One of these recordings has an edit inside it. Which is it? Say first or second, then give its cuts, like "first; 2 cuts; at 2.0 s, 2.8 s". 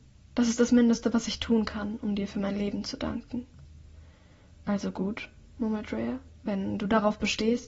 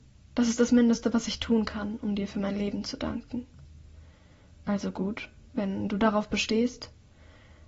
second; 1 cut; at 5.5 s